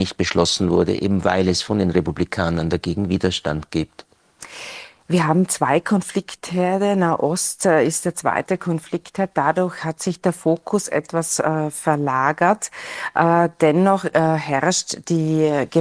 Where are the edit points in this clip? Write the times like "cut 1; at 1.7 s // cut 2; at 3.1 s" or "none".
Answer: none